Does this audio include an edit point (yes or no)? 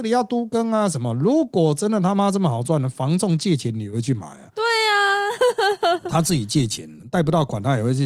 no